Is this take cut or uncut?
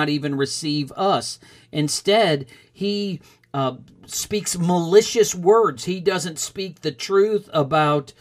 uncut